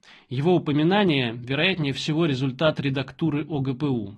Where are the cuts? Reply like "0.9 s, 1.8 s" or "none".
none